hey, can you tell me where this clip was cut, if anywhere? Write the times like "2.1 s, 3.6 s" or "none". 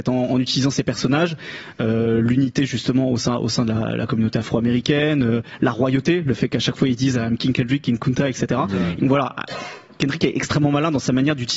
9.0 s